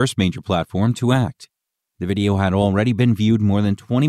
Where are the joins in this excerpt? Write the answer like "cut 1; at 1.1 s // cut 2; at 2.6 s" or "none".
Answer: cut 1; at 1.8 s